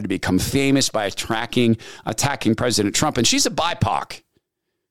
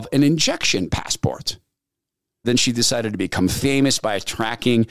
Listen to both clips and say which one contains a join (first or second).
second